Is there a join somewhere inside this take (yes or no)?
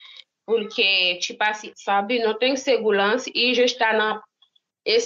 yes